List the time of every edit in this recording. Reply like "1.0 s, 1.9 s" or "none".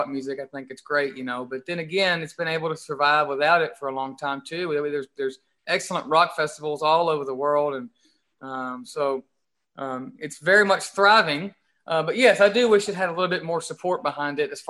none